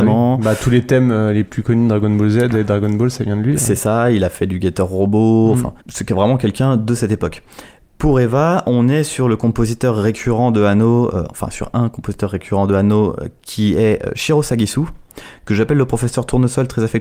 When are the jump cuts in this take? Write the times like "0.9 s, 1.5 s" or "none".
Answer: 5.8 s

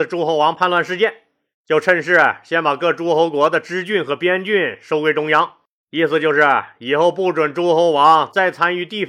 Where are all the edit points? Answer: 1.5 s, 5.8 s

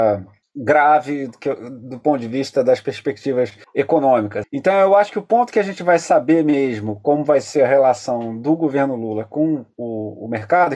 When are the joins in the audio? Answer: 4.4 s

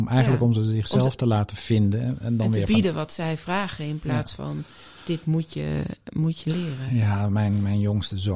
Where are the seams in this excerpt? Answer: none

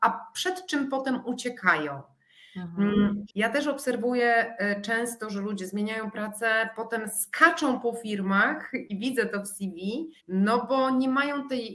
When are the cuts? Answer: 3.3 s, 10.2 s

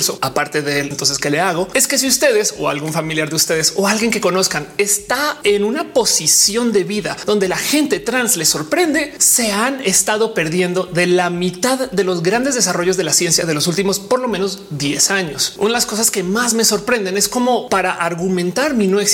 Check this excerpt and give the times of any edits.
0.9 s

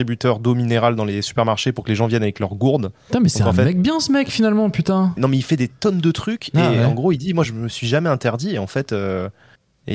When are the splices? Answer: 5.2 s

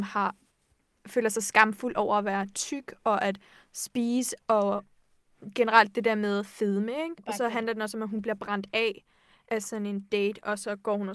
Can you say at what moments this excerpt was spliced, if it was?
none

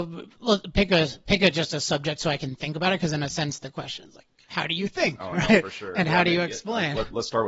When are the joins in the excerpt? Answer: none

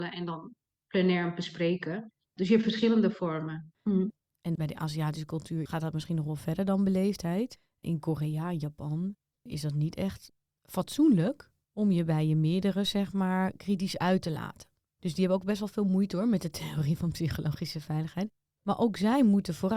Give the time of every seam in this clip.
3.7 s

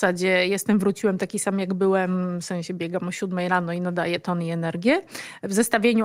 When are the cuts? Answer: none

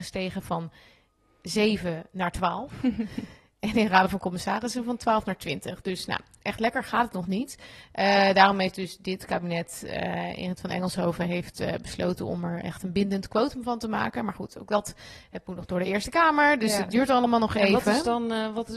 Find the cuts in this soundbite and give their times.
none

